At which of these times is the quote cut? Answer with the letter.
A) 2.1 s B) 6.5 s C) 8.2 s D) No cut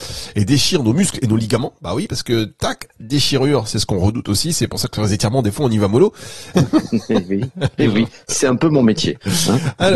B